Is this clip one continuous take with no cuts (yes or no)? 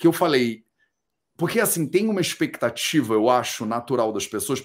yes